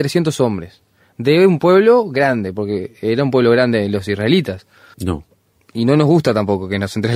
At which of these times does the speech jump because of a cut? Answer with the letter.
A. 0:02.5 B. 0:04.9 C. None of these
B